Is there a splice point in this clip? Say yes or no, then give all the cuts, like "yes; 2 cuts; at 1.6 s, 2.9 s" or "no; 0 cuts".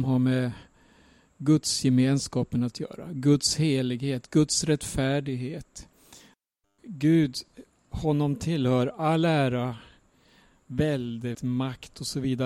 yes; 2 cuts; at 6.8 s, 11.3 s